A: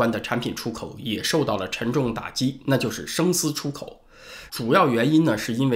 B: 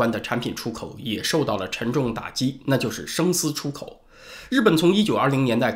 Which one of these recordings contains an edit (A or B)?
A